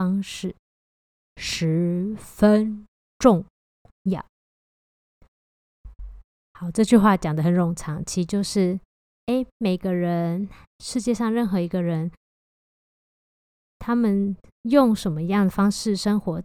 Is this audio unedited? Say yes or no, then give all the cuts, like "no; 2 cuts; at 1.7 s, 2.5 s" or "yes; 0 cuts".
yes; 0 cuts